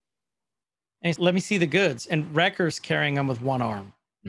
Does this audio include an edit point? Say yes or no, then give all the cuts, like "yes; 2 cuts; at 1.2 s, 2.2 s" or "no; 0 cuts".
yes; 1 cut; at 1.2 s